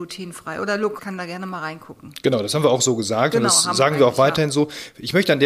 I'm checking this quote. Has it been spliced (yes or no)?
yes